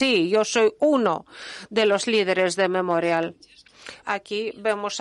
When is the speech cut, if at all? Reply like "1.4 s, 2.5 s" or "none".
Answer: 4.0 s